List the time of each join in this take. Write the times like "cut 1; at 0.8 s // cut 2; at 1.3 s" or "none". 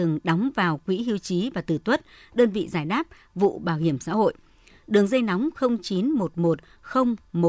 none